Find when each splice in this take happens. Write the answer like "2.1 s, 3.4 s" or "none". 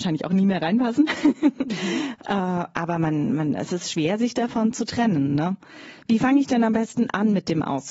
none